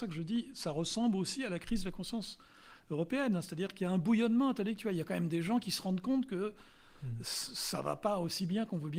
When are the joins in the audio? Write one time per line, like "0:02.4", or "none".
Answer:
none